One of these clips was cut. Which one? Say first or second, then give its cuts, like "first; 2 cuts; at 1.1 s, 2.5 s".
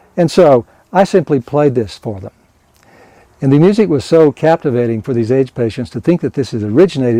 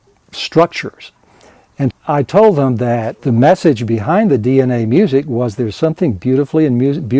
second; 2 cuts; at 1.9 s, 3.2 s